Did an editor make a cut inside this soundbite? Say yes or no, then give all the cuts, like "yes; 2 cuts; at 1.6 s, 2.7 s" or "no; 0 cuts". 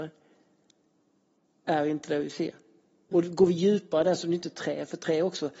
yes; 1 cut; at 3.1 s